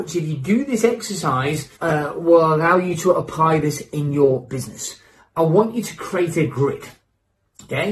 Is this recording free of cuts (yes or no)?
no